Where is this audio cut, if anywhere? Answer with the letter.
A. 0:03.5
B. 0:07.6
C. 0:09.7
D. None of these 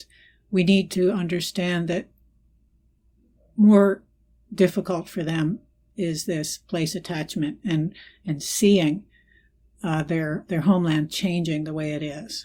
D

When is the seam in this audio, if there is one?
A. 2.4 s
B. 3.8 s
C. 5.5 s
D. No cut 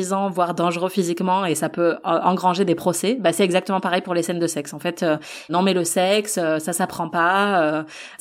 C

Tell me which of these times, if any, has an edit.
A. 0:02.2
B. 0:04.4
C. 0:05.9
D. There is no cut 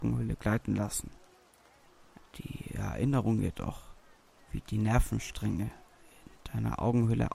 A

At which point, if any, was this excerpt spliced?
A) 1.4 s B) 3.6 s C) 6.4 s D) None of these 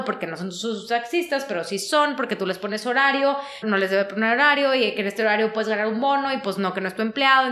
B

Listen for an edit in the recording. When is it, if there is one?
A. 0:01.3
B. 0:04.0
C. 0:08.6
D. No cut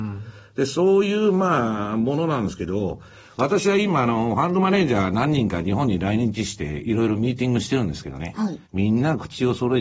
C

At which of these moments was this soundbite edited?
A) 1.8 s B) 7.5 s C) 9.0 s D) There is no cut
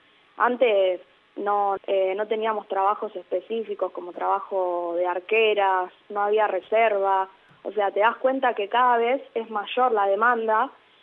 A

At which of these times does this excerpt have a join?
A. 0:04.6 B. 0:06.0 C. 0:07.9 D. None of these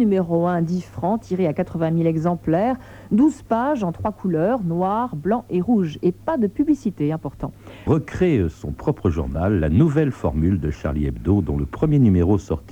C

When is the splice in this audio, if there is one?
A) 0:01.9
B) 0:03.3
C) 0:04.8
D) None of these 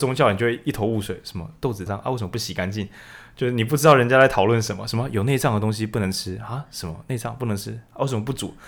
A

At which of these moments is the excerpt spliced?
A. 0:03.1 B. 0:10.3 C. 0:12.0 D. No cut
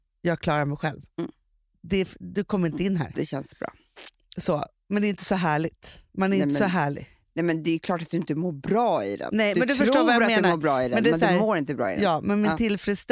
A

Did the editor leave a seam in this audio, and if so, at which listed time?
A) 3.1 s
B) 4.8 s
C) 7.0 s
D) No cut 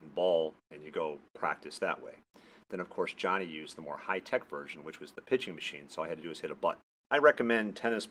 C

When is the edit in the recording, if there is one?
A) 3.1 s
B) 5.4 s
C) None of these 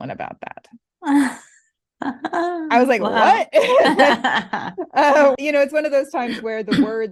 B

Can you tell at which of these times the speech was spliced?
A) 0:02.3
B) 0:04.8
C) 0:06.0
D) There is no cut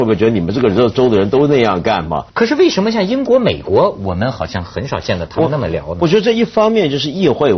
A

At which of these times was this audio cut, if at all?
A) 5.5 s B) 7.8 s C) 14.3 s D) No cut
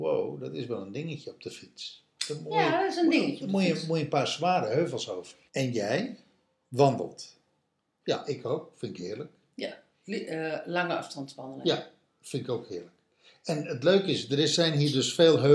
A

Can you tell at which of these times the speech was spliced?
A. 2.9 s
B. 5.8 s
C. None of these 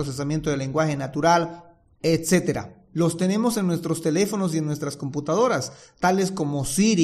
A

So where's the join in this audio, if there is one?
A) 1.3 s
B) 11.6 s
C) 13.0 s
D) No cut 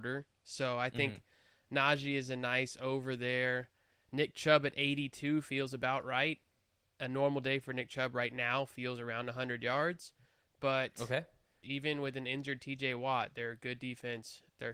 B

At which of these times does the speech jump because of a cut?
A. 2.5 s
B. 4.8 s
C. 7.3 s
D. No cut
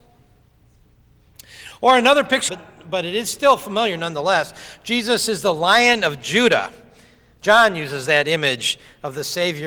A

